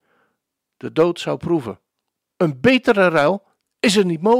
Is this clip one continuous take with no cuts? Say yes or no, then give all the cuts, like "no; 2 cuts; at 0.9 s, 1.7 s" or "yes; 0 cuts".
no; 1 cut; at 2.3 s